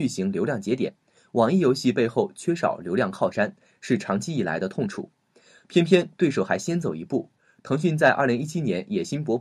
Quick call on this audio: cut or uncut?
uncut